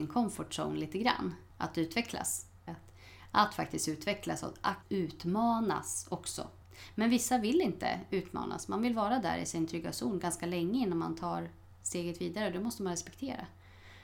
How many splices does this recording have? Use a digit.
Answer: 1